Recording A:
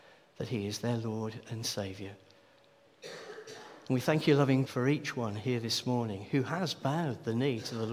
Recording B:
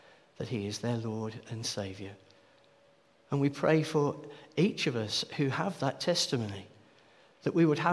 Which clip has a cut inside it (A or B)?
A